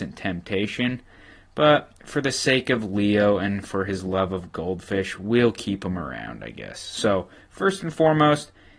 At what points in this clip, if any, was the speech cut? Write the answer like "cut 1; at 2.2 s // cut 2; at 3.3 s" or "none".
none